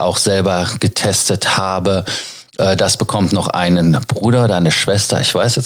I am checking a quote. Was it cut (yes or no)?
no